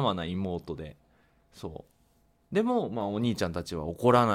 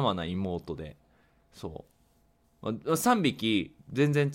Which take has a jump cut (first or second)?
second